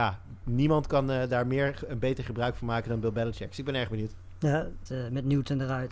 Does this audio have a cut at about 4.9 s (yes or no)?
yes